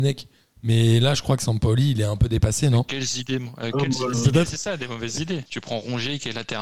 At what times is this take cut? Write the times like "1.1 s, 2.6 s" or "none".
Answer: 4.1 s, 5.5 s